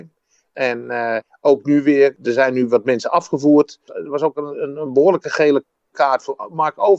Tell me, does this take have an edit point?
yes; 1 cut; at 3.9 s

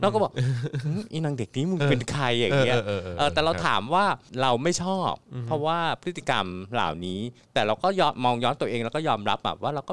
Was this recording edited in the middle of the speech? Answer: no; 0 cuts

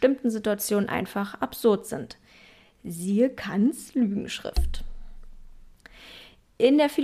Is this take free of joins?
yes; 0 cuts

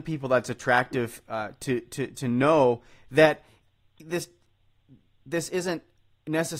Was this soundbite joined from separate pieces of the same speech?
no; 0 cuts

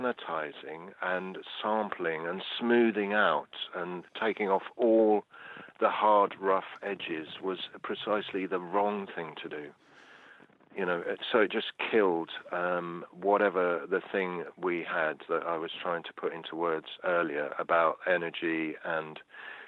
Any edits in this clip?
no; 0 cuts

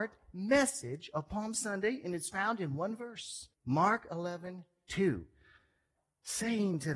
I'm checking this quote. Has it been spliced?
yes; 1 cut; at 3.5 s

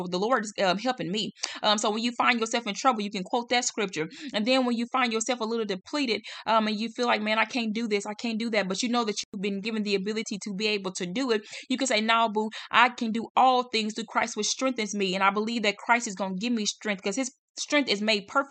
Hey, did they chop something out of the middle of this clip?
no; 0 cuts

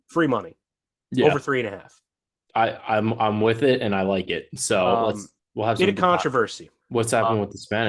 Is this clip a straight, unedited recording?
no; 1 cut; at 6.8 s

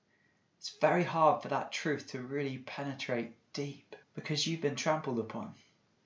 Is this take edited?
yes; 1 cut; at 4.0 s

